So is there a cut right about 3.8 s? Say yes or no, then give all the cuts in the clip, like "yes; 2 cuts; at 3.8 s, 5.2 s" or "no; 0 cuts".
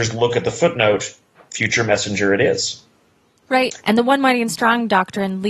yes; 1 cut; at 3.8 s